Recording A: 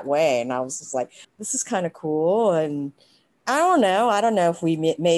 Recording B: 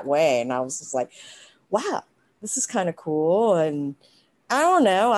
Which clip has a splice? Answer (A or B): A